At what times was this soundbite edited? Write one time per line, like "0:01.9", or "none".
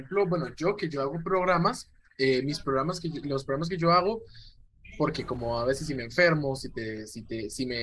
none